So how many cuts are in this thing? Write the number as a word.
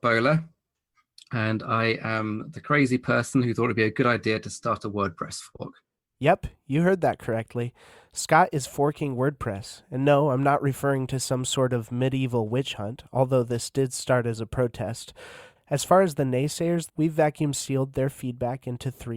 two